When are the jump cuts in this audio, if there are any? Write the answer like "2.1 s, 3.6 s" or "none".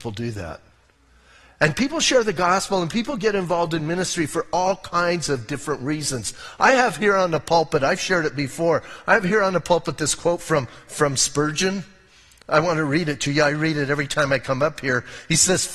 none